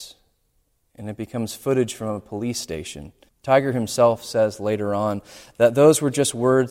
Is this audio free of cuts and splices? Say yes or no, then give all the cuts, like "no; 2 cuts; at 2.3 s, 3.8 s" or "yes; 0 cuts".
no; 1 cut; at 3.3 s